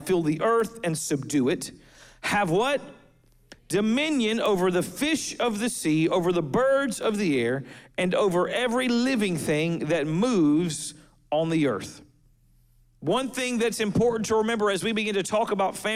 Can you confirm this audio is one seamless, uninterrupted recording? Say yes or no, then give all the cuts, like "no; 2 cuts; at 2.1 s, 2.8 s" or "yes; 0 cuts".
yes; 0 cuts